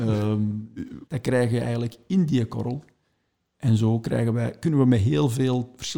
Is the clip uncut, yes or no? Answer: no